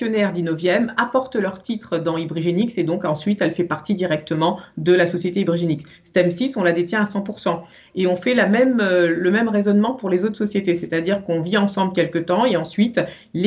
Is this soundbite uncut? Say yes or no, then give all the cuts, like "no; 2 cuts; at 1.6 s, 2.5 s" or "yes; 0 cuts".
yes; 0 cuts